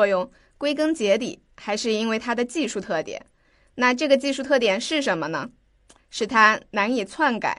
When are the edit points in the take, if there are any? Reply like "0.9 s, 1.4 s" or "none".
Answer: none